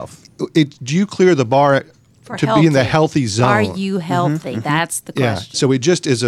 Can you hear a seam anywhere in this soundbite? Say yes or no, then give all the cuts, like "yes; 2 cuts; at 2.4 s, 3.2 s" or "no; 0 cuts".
no; 0 cuts